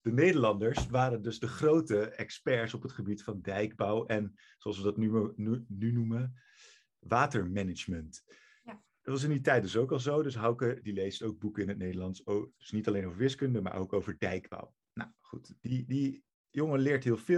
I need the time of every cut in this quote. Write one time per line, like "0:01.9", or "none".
none